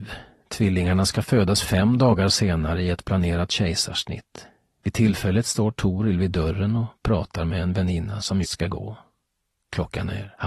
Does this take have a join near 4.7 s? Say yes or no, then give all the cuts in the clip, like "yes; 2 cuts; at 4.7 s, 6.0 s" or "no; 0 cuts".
no; 1 cut; at 8.4 s